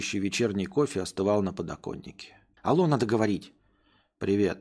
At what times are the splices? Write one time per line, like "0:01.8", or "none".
0:02.6